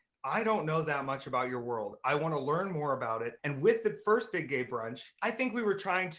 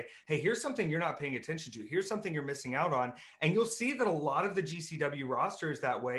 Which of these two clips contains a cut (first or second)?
first